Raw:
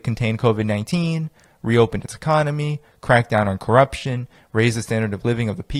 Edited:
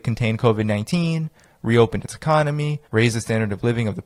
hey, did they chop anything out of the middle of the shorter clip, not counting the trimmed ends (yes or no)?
yes